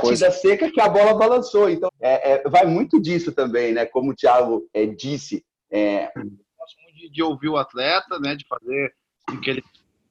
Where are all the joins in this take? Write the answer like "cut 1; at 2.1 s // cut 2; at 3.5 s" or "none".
cut 1; at 1.9 s // cut 2; at 4.7 s // cut 3; at 6.2 s

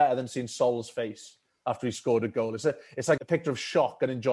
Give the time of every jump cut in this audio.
cut 1; at 3.2 s

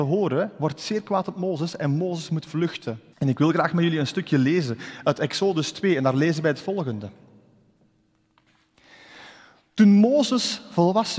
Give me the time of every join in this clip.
cut 1; at 3.1 s

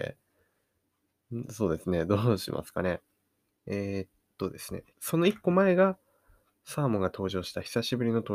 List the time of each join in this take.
cut 1; at 3.5 s // cut 2; at 4.9 s

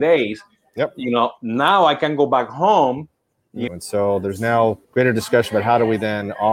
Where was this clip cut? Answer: cut 1; at 3.7 s // cut 2; at 4.8 s

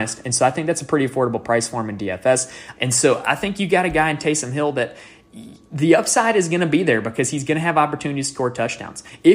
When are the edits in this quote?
cut 1; at 2.7 s

